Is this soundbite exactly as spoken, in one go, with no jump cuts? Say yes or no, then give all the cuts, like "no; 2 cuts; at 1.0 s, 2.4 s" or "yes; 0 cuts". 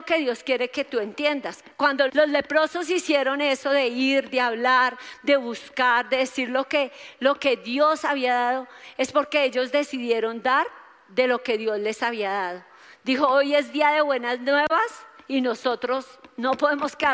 no; 1 cut; at 2.1 s